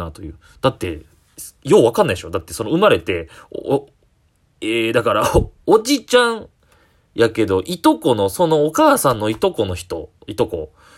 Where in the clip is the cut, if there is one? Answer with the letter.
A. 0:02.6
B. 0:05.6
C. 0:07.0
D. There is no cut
D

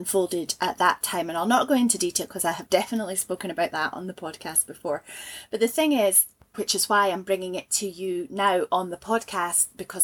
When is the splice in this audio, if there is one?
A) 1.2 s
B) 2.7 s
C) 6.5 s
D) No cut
C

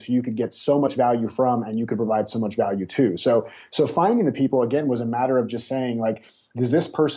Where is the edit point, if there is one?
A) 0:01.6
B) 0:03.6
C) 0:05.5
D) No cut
D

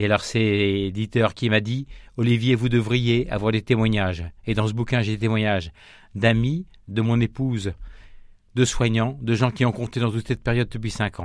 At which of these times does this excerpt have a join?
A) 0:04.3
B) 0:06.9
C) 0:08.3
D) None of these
B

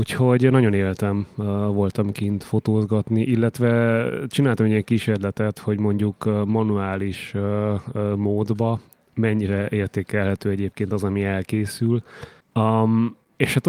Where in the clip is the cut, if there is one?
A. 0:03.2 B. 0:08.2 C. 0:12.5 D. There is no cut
D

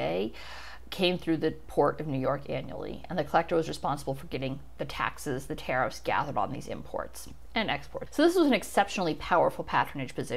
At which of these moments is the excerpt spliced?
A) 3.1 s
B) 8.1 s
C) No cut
B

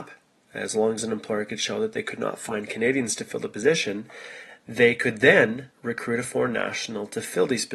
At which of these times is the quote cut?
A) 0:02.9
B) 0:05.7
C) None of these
B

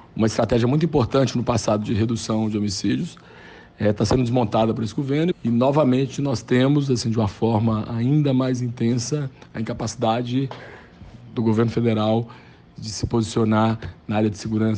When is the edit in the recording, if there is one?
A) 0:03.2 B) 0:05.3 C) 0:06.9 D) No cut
B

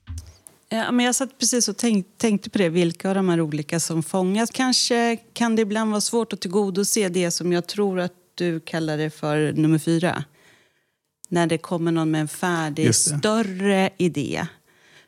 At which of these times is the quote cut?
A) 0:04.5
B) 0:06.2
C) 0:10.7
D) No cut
A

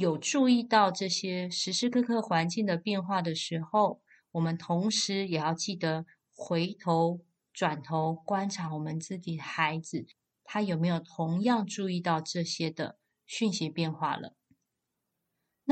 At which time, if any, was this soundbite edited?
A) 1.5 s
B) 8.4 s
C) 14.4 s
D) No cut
D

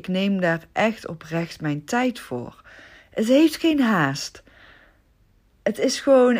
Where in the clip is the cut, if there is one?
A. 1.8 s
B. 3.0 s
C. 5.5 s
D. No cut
D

